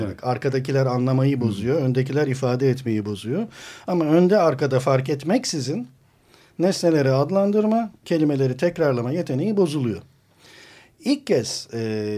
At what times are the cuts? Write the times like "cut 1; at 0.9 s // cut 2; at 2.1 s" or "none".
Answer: cut 1; at 8.0 s